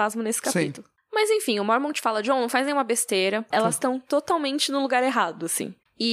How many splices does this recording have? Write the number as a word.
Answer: one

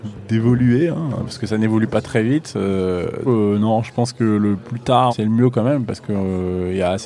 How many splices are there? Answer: two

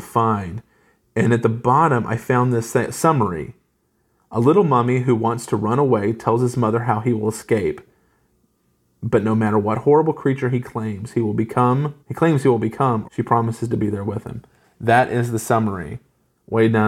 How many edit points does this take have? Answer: two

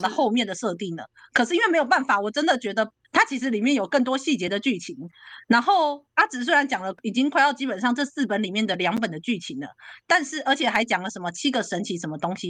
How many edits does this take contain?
one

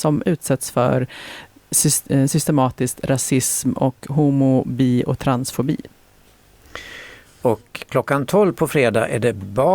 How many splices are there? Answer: zero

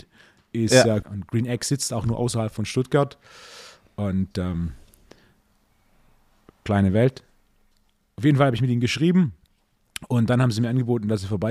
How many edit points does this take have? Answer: one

